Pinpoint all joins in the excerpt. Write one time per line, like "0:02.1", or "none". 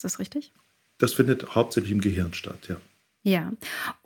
none